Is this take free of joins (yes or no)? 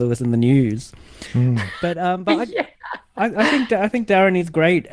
yes